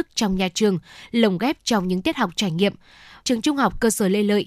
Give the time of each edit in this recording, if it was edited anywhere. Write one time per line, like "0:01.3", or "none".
0:03.2

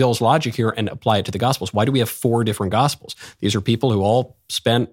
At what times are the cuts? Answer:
none

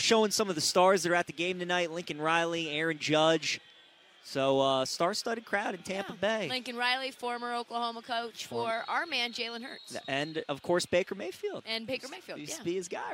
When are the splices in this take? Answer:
none

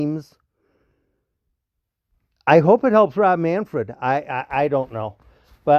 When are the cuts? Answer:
none

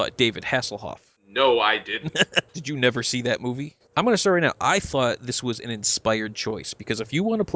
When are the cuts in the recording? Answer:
0:02.5
0:03.9

